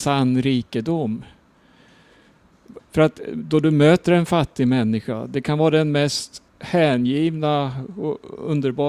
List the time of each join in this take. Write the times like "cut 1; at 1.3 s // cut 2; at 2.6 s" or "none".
cut 1; at 2.8 s // cut 2; at 6.5 s